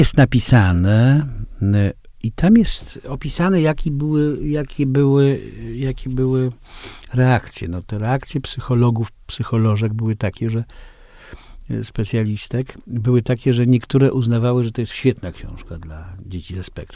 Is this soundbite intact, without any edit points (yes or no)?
yes